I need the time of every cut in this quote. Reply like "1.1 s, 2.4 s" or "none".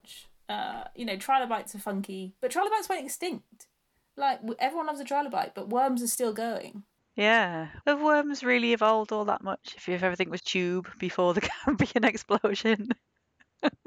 7.8 s, 10.4 s